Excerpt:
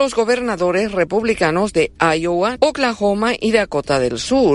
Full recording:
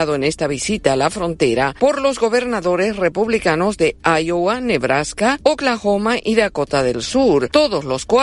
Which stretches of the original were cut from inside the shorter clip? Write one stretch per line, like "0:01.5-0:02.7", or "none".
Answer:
0:04.6-0:05.4